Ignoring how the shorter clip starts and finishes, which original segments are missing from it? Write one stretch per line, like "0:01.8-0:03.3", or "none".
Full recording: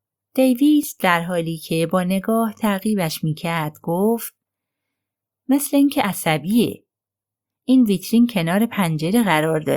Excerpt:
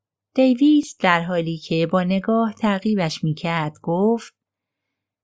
none